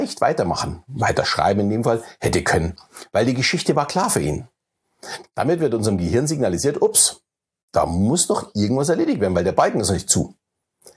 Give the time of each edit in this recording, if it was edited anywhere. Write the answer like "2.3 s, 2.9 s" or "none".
5.2 s